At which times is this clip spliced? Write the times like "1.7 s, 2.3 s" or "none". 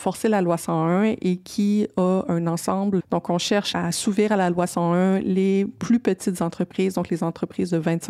3.0 s